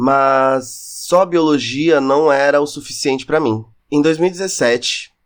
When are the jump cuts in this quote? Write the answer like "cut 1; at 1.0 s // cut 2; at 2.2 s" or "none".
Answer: cut 1; at 3.8 s